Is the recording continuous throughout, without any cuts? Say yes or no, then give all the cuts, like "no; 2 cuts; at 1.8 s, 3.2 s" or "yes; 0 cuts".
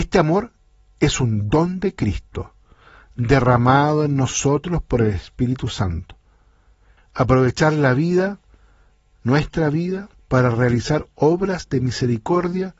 no; 2 cuts; at 7.0 s, 10.1 s